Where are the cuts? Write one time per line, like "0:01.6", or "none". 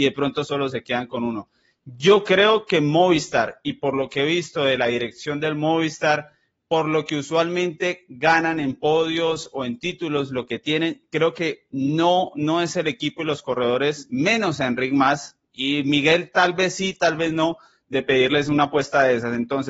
none